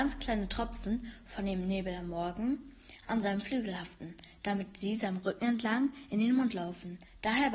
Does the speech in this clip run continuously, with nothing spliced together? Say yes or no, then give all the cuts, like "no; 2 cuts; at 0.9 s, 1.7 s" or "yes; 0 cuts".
yes; 0 cuts